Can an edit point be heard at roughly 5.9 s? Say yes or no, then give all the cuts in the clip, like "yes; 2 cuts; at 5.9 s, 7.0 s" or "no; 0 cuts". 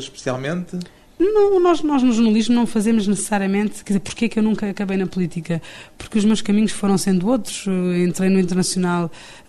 no; 0 cuts